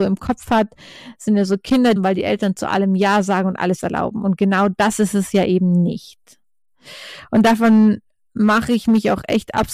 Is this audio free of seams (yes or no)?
no